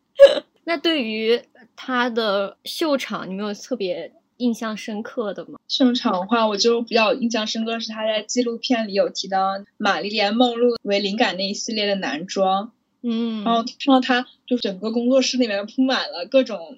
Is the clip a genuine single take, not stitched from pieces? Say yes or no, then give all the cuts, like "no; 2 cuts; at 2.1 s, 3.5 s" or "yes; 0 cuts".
yes; 0 cuts